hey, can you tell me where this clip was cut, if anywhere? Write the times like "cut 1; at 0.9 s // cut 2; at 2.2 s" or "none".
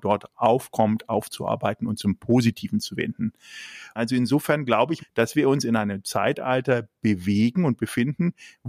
cut 1; at 4.0 s // cut 2; at 5.0 s